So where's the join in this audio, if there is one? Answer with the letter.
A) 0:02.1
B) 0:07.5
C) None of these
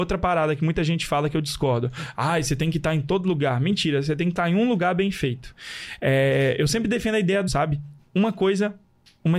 B